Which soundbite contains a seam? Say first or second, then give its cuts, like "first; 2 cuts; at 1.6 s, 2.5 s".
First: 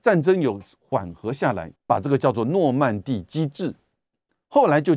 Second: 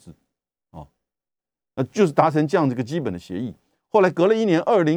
first; 1 cut; at 1.8 s